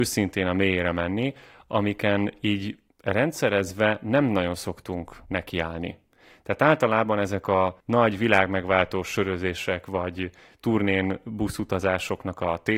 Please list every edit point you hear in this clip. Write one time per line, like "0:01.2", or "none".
none